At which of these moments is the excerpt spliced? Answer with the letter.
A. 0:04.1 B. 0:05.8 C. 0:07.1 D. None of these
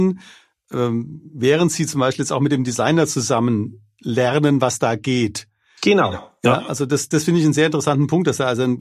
C